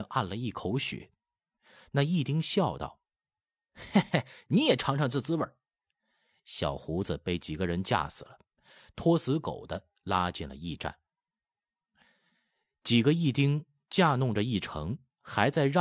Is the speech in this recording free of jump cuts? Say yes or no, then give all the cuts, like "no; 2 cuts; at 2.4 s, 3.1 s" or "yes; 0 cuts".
yes; 0 cuts